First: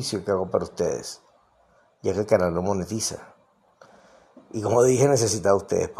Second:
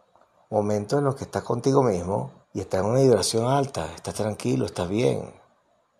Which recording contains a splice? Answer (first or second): second